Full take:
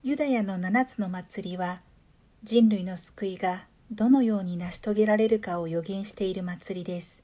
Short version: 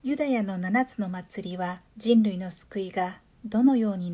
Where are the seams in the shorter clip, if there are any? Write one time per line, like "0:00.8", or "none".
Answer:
0:01.9